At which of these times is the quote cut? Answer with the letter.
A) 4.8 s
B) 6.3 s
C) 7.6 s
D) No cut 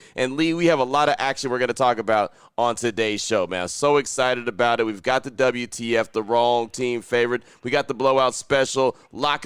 D